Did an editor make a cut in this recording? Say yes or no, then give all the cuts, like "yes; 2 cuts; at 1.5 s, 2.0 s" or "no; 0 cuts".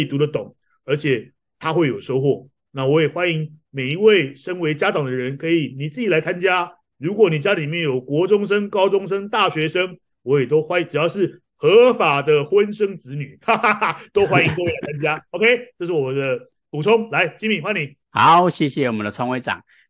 no; 0 cuts